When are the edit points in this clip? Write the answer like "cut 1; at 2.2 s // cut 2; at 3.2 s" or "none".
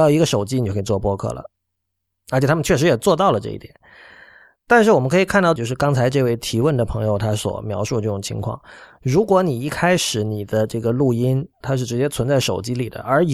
cut 1; at 5.6 s // cut 2; at 11.6 s